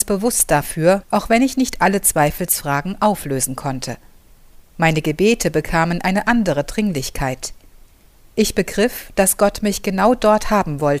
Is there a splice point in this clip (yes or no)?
yes